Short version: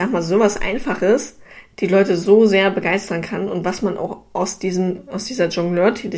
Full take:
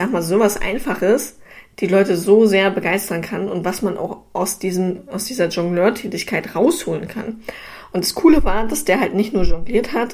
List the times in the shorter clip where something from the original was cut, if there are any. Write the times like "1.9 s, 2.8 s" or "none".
none

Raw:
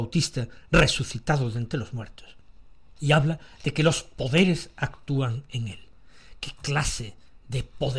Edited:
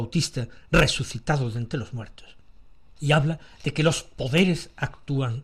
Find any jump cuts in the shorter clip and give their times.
none

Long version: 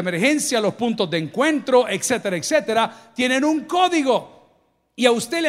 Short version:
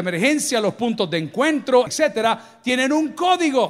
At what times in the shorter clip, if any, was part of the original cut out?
1.9 s

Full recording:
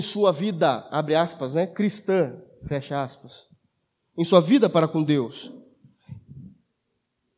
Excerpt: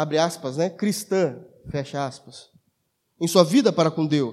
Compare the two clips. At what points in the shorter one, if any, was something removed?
none

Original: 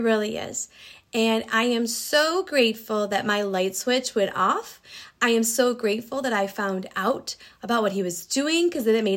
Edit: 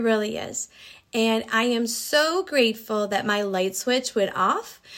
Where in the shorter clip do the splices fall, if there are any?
none

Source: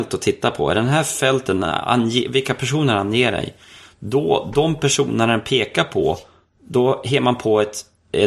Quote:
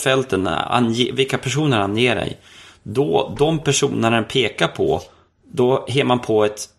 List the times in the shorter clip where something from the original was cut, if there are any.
none

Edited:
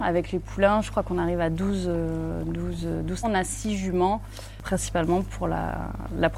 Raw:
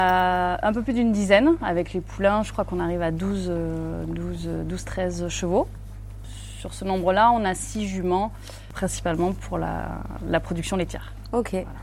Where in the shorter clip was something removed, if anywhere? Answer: 3.2 s

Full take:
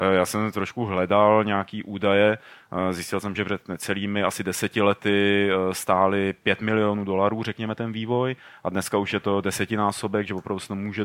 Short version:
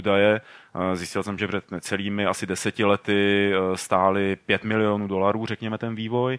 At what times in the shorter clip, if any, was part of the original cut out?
none

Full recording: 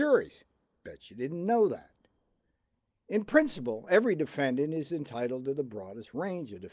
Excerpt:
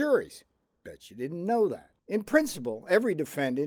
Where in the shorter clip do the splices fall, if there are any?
2.0 s

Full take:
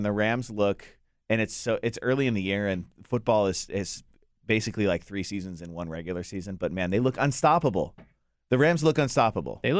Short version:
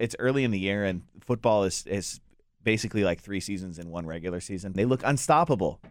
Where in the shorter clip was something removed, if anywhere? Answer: 4.7 s

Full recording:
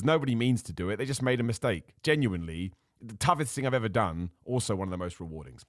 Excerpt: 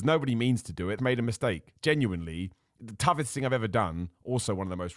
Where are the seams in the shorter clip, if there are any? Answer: 1.0 s

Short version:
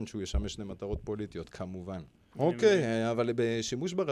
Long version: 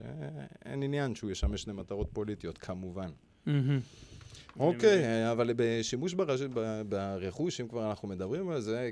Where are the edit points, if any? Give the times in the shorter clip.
2.3 s

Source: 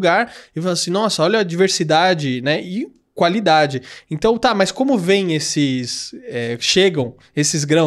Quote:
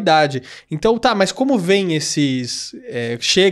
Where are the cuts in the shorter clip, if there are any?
none

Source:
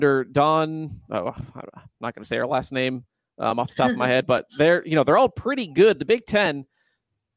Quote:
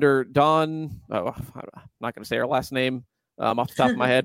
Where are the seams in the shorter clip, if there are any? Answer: none

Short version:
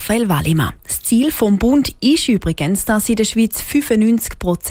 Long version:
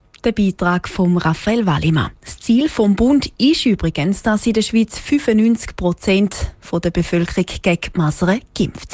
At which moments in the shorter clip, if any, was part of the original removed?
none

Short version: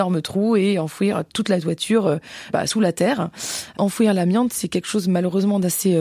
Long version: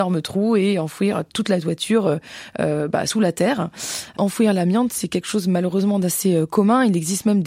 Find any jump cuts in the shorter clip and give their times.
2.5 s

